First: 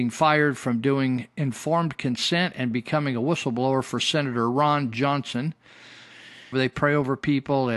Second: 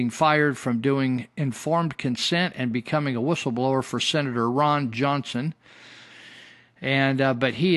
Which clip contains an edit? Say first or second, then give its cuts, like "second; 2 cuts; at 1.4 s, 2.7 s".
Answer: first; 1 cut; at 6.5 s